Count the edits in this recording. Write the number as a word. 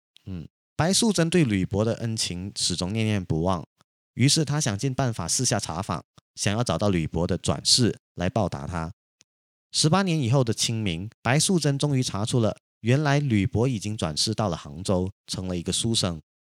one